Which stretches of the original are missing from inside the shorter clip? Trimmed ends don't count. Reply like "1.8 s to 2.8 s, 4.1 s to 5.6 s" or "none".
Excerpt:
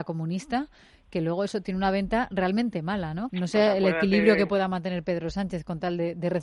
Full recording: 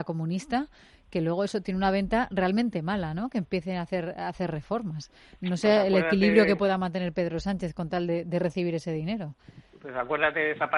3.3 s to 5.4 s